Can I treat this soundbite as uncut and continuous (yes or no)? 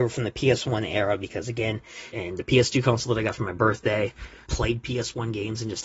no